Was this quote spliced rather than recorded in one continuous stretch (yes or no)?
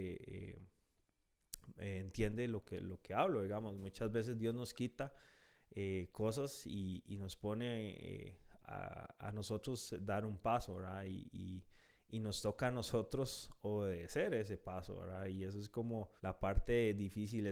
yes